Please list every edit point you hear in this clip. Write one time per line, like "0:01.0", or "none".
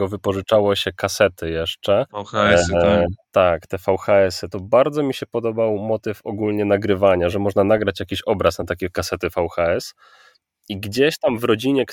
0:02.1
0:03.2
0:04.5